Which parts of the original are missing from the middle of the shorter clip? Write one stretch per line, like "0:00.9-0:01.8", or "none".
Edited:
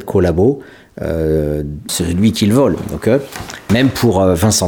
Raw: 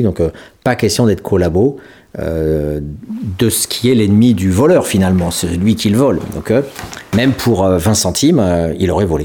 0:03.1-0:05.3